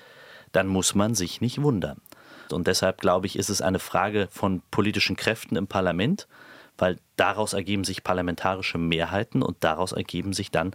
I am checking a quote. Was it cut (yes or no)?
yes